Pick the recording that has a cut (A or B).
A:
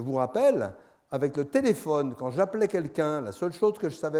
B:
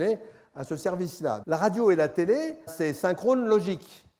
B